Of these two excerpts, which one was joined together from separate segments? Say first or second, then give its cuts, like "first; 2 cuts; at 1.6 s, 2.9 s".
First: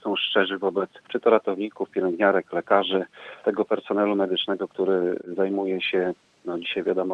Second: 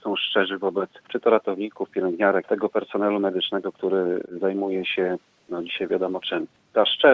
second; 1 cut; at 2.4 s